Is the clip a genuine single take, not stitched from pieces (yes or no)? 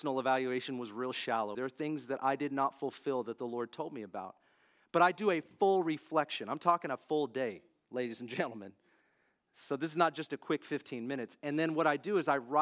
no